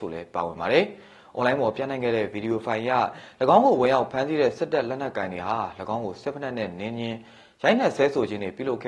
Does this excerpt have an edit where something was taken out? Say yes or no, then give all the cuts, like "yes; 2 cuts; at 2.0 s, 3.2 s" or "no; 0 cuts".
no; 0 cuts